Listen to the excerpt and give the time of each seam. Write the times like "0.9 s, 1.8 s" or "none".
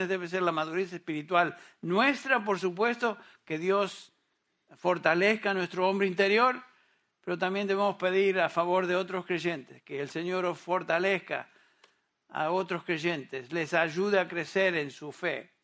none